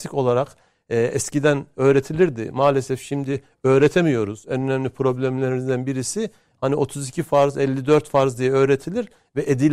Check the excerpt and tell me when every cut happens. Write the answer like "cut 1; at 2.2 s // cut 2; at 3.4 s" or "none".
none